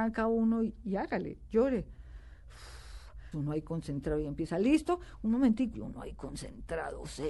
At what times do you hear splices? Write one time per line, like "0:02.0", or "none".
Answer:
0:03.3
0:05.7